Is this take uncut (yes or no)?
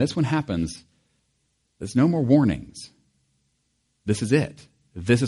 yes